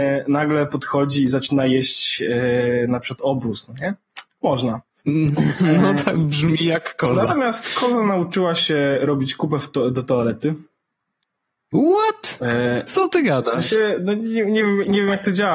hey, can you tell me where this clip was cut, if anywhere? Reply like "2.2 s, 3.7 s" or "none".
none